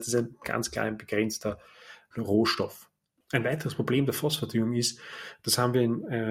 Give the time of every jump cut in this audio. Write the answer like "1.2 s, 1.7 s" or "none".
2.1 s